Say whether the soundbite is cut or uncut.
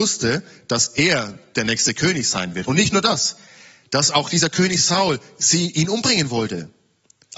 uncut